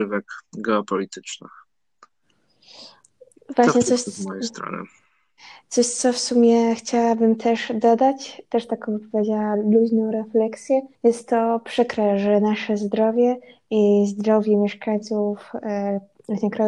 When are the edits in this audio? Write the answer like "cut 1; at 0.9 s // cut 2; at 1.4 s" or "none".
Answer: cut 1; at 10.9 s